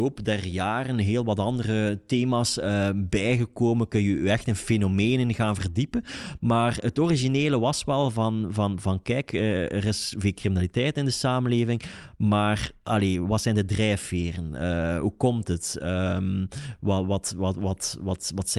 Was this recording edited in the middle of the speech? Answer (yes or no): no